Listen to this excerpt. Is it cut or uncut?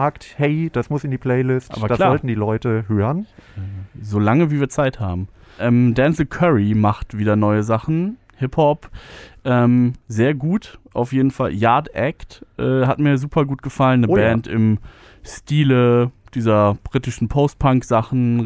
cut